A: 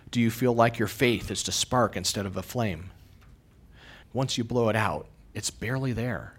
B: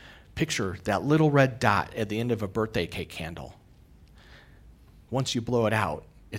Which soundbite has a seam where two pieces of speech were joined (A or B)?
A